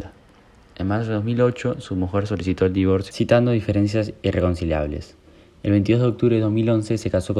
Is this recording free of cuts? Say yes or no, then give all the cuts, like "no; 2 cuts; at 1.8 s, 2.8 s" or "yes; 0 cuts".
yes; 0 cuts